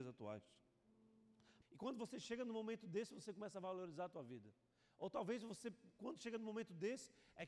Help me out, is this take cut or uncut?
cut